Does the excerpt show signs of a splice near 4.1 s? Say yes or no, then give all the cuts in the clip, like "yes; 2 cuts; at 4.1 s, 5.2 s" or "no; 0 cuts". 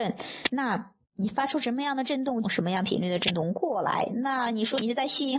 no; 2 cuts; at 1.0 s, 2.4 s